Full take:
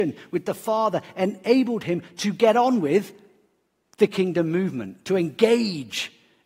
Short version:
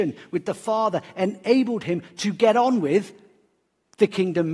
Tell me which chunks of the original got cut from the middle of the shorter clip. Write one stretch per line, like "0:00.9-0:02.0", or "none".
none